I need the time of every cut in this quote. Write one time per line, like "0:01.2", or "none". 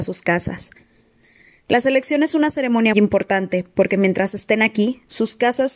0:02.9